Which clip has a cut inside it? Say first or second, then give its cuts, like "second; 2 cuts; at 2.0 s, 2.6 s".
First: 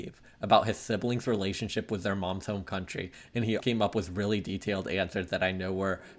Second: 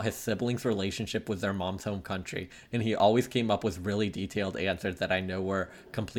first; 1 cut; at 3.6 s